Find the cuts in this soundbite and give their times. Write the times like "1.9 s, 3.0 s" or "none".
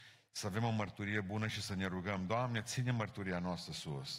none